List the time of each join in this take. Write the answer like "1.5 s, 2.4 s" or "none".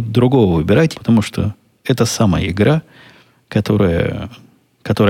0.9 s

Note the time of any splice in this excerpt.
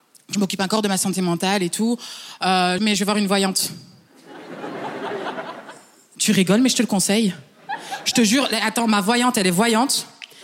2.8 s

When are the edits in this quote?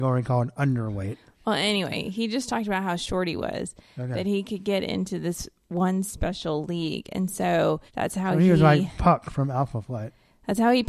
7.9 s

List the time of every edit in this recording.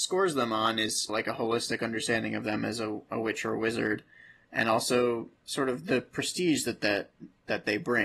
1.1 s

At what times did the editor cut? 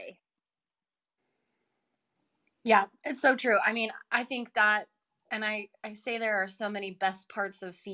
none

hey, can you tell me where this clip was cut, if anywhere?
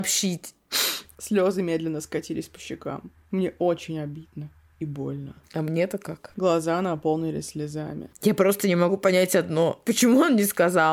6.3 s

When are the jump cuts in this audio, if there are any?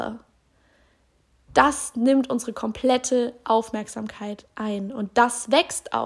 none

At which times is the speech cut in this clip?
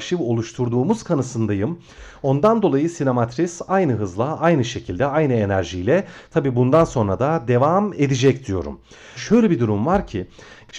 9.2 s

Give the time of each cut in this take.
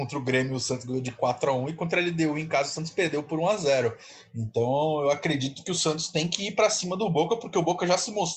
none

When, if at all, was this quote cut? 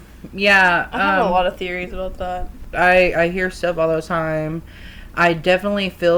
2.7 s

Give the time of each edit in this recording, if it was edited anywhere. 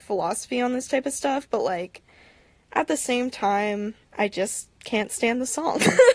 4.0 s

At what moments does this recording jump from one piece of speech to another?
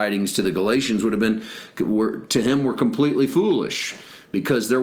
none

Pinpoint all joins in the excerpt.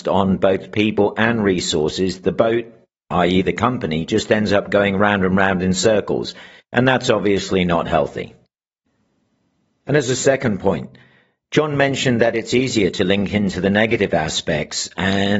none

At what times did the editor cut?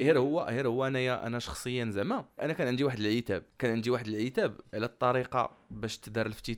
2.4 s, 3.5 s

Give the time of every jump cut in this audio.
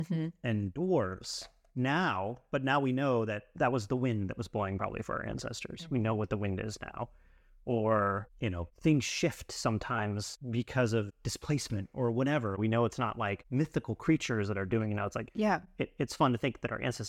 none

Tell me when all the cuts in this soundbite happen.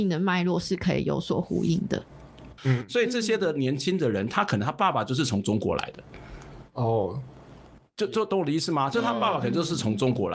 2.6 s

